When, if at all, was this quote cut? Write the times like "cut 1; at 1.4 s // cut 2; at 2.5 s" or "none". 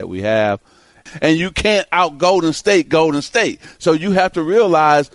cut 1; at 1.1 s